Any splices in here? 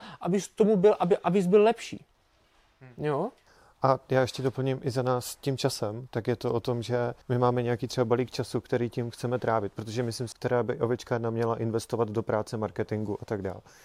yes; 2 cuts; at 7.2 s, 10.3 s

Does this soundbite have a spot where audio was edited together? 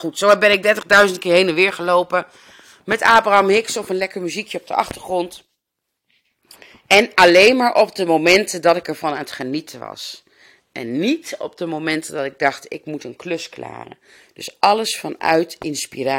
no; 0 cuts

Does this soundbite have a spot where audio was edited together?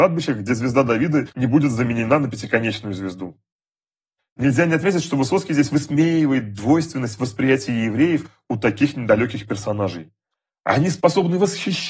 no; 0 cuts

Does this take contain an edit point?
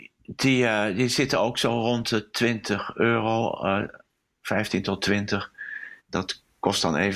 yes; 1 cut; at 6.0 s

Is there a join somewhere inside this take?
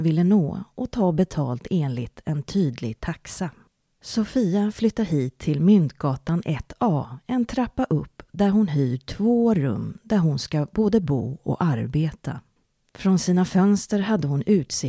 no; 0 cuts

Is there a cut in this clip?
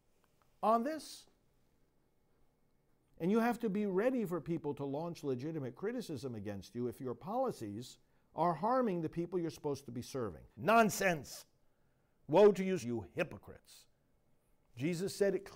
yes; 3 cuts; at 3.0 s, 10.5 s, 12.8 s

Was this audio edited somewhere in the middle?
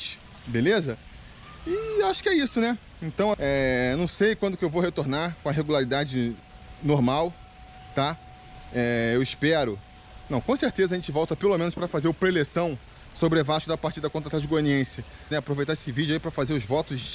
yes; 2 cuts; at 3.3 s, 15.3 s

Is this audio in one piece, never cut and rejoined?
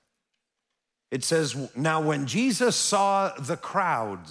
yes; 0 cuts

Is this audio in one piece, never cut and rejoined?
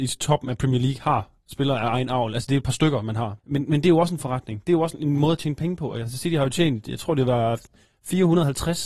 no; 1 cut; at 3.4 s

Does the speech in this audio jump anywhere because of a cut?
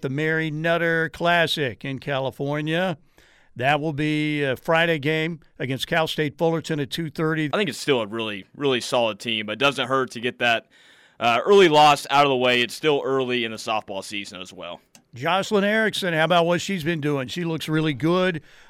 yes; 1 cut; at 7.5 s

